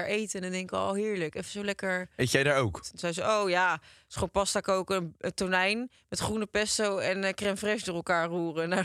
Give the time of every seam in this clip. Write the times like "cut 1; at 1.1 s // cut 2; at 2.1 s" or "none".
cut 1; at 2.8 s